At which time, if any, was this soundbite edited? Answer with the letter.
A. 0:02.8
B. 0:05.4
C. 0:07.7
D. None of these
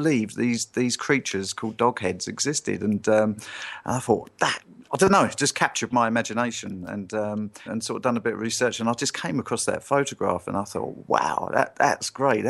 C